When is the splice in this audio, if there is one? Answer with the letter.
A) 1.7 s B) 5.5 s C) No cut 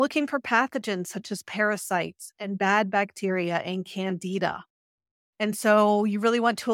C